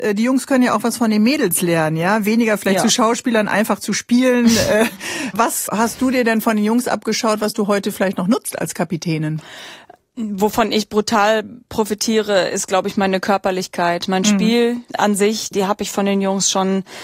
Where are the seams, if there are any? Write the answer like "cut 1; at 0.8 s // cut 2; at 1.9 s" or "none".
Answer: cut 1; at 15.5 s